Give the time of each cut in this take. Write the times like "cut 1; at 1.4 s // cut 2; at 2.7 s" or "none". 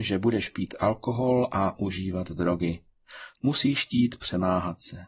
cut 1; at 3.4 s

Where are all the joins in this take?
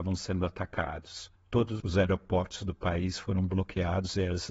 cut 1; at 1.4 s

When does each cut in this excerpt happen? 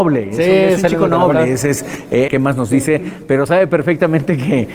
cut 1; at 2.3 s

